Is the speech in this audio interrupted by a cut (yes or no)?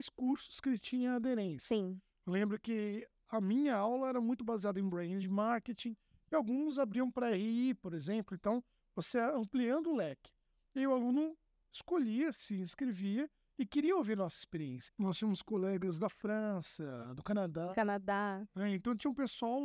yes